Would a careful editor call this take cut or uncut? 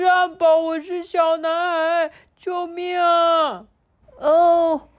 cut